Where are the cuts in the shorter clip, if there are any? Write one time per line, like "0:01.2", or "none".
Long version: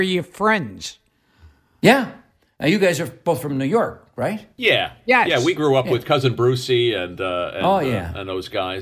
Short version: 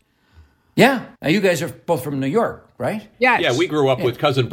0:01.2
0:03.1